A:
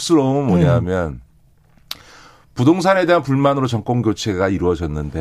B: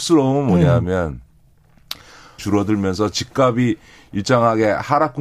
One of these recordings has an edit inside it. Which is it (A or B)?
B